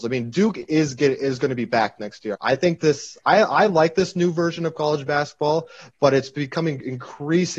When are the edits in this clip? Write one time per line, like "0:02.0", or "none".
0:02.3